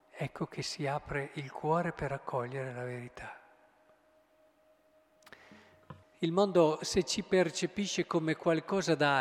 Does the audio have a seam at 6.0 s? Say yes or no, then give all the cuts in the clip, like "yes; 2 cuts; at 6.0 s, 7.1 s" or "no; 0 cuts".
yes; 1 cut; at 6.0 s